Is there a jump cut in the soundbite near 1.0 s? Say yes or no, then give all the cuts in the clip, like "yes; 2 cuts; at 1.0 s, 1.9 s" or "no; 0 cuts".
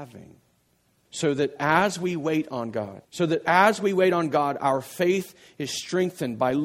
yes; 2 cuts; at 1.0 s, 3.0 s